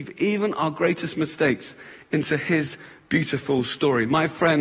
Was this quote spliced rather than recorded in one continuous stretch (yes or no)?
no